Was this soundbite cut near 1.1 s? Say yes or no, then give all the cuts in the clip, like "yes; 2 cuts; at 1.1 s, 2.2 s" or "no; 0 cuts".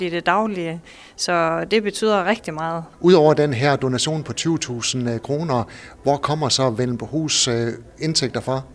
no; 1 cut; at 2.9 s